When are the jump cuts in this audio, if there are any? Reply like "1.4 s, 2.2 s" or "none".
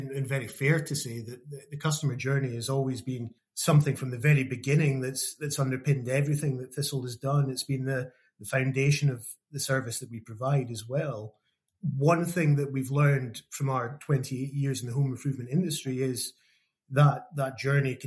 none